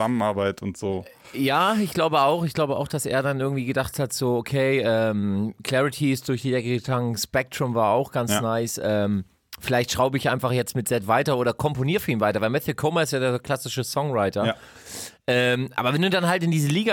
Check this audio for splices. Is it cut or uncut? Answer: uncut